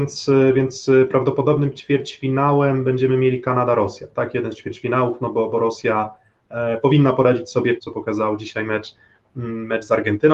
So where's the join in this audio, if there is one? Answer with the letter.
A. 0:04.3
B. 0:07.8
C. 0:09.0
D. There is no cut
B